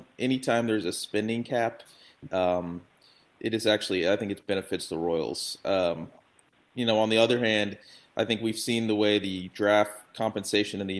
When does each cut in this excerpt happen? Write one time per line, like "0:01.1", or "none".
none